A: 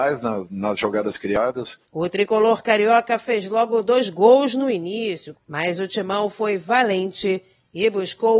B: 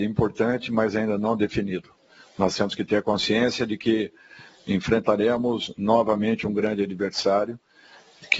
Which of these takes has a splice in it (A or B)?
A